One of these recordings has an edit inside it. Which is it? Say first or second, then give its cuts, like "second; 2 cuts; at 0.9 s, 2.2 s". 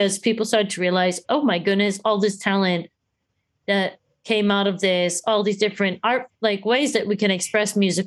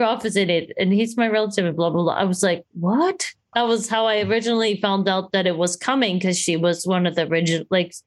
second; 1 cut; at 3.5 s